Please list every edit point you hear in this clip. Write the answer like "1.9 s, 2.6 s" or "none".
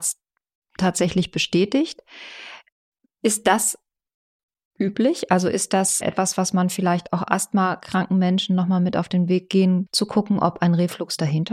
6.0 s, 9.9 s